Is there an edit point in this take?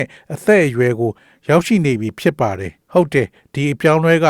yes; 1 cut; at 2.8 s

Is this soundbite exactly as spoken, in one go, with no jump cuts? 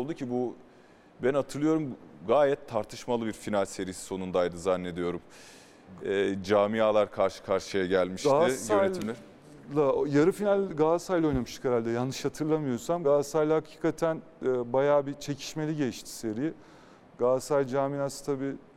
yes; 0 cuts

